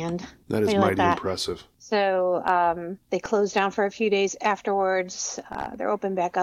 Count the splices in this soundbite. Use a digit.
0